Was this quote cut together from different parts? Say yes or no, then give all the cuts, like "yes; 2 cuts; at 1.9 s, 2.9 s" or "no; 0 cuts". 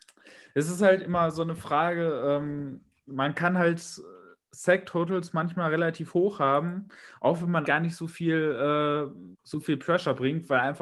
yes; 2 cuts; at 7.6 s, 9.3 s